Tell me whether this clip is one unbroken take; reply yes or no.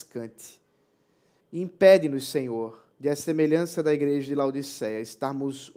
no